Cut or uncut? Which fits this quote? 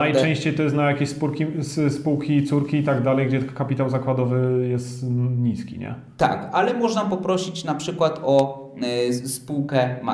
uncut